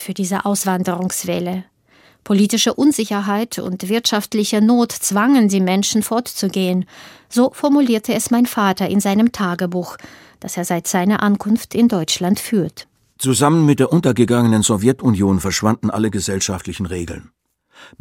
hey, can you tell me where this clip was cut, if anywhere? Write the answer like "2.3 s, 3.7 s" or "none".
none